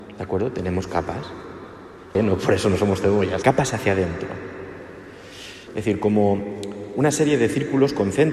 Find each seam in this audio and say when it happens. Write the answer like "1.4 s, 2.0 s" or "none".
2.1 s, 3.4 s, 5.7 s